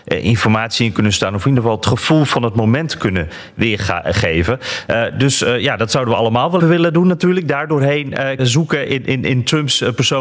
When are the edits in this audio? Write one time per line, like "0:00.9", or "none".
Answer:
0:06.6
0:08.4